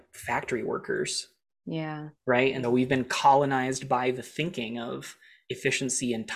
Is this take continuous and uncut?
no; 1 cut; at 2.6 s

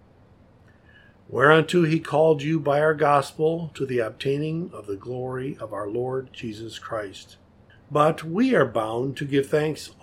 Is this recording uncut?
no; 1 cut; at 7.7 s

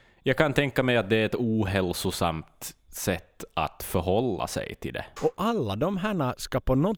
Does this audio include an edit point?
yes; 1 cut; at 5.2 s

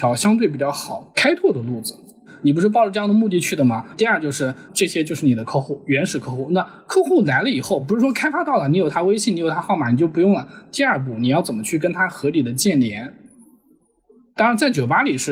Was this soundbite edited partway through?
no; 0 cuts

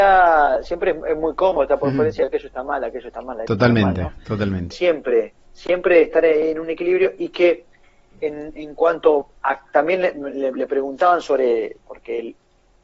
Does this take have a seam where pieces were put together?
yes; 1 cut; at 4.7 s

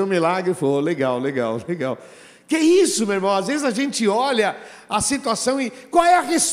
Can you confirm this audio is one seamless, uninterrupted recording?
yes; 0 cuts

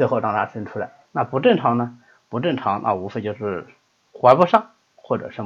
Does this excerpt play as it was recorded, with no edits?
no; 1 cut; at 1.0 s

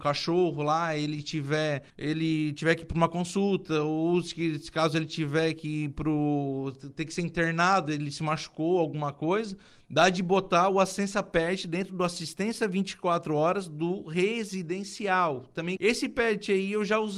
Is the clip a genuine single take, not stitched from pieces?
no; 2 cuts; at 1.9 s, 15.8 s

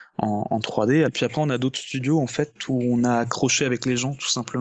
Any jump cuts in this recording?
yes; 1 cut; at 1.0 s

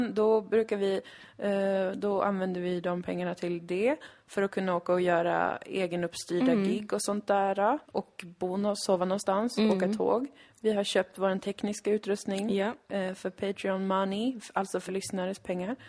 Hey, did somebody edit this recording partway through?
yes; 2 cuts; at 7.8 s, 14.9 s

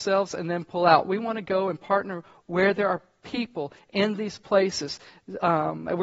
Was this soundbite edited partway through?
no; 0 cuts

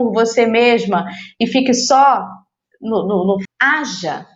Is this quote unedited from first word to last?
no; 1 cut; at 3.4 s

